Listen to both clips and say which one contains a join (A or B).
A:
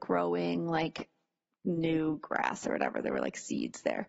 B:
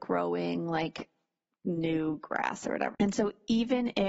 B